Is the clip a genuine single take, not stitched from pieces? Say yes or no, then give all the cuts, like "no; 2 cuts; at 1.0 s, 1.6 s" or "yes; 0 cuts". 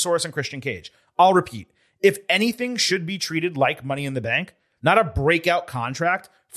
no; 1 cut; at 4.8 s